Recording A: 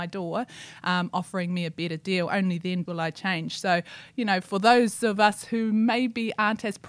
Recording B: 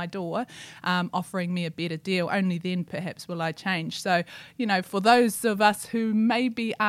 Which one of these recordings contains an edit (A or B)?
A